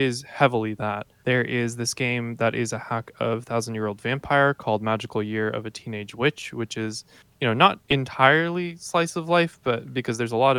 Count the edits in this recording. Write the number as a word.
two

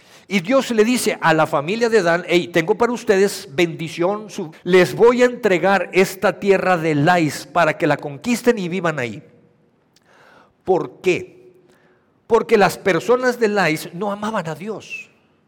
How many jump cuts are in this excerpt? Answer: one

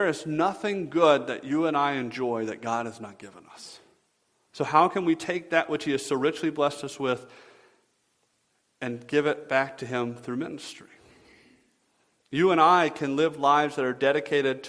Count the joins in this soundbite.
one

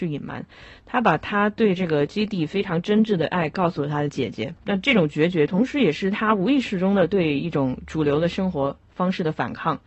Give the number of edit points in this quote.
one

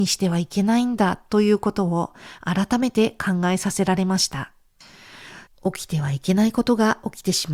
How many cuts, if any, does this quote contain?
one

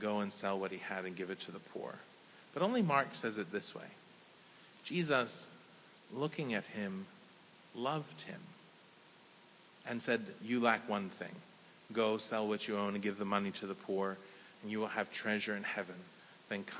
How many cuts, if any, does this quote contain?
zero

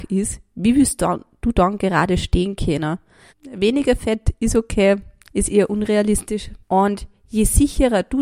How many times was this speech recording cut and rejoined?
three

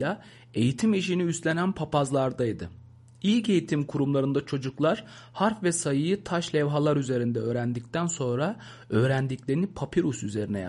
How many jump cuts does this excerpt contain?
zero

